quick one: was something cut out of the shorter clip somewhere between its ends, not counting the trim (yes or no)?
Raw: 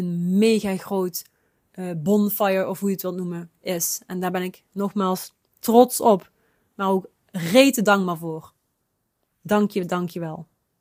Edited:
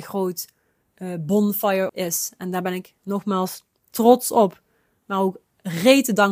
yes